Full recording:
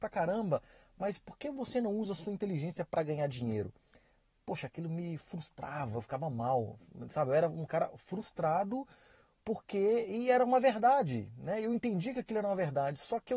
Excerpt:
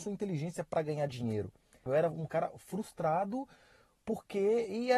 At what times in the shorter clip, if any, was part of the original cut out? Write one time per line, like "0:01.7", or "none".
0:01.9